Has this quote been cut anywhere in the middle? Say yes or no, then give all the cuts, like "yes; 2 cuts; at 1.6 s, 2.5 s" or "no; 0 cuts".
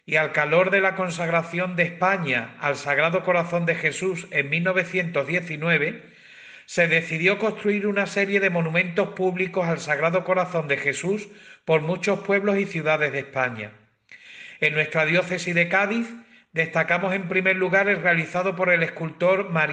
no; 0 cuts